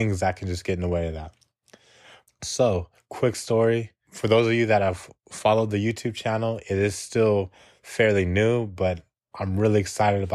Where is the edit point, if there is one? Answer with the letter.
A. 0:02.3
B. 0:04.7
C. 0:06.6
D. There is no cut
A